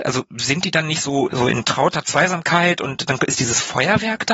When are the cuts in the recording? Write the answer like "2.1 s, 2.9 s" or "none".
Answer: 1.3 s